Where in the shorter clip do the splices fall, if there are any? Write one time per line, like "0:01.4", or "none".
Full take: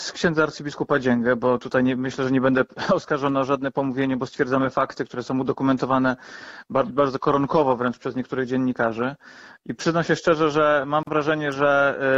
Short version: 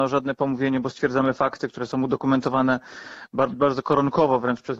none